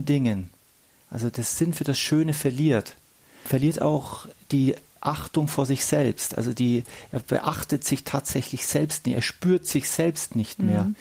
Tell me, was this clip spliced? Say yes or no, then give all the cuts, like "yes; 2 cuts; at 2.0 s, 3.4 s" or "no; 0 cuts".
no; 0 cuts